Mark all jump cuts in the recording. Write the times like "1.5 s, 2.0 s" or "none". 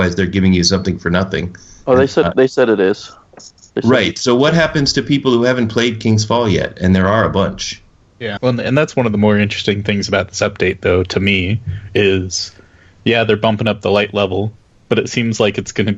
8.4 s